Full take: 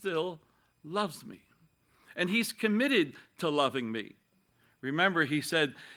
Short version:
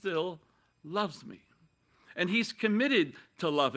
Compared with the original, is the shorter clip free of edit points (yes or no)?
yes